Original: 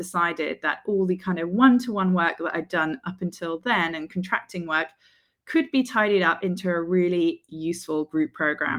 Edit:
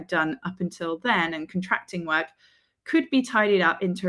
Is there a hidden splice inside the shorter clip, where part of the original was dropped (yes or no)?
no